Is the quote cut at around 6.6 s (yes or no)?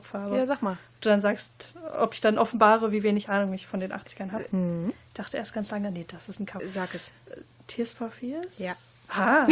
yes